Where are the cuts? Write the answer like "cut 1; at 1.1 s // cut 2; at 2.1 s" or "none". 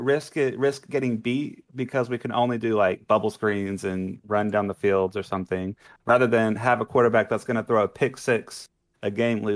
none